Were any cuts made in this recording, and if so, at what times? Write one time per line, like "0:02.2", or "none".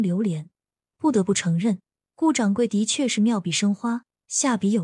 none